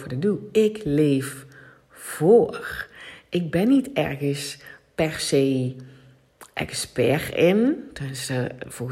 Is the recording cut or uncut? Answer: uncut